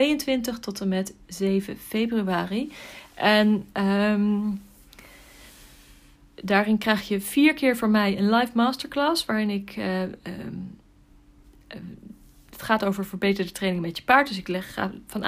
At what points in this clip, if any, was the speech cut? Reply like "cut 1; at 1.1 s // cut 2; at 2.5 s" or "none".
none